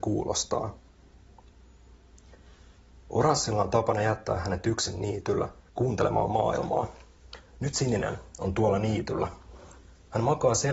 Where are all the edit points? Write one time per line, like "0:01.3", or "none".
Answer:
0:05.7